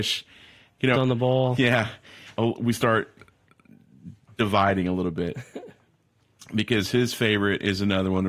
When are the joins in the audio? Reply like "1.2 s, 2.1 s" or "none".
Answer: 0.9 s, 2.4 s